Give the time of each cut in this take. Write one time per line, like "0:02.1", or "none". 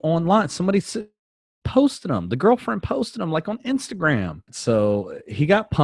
0:04.5